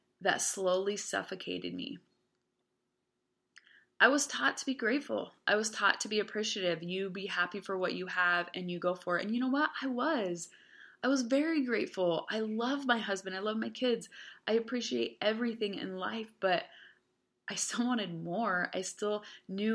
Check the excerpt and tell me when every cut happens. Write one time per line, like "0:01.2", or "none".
none